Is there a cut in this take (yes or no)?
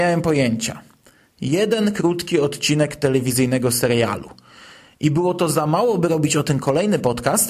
no